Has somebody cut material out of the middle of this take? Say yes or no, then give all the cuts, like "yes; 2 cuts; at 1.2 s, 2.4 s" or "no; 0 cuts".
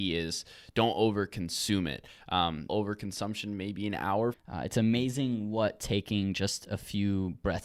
yes; 2 cuts; at 2.7 s, 4.3 s